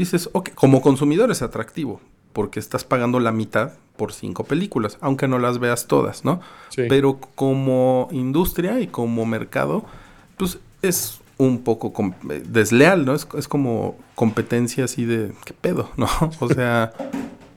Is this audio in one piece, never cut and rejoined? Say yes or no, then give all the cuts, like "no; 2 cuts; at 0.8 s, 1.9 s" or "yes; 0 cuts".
yes; 0 cuts